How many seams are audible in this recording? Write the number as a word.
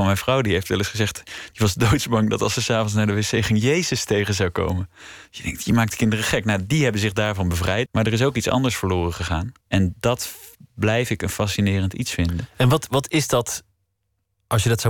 two